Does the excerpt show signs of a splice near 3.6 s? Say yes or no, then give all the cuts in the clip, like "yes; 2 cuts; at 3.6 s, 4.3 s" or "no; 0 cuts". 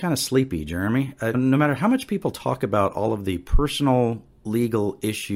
no; 1 cut; at 1.3 s